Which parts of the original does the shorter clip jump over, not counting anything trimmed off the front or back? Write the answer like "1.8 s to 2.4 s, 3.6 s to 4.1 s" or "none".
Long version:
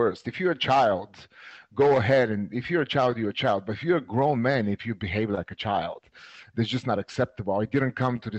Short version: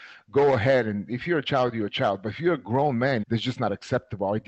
4.7 s to 6.5 s